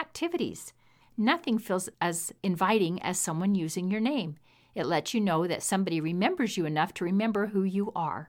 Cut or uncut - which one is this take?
cut